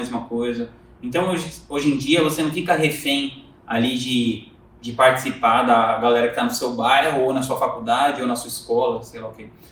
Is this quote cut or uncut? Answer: uncut